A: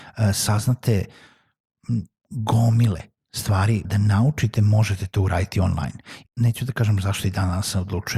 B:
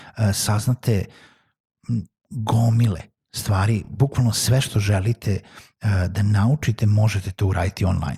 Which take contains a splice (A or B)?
A